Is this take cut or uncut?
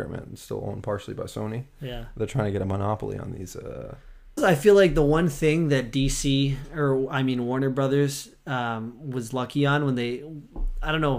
cut